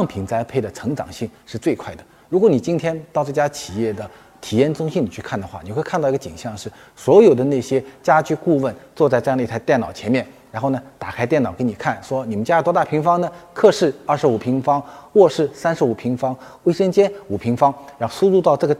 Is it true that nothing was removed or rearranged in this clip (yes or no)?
yes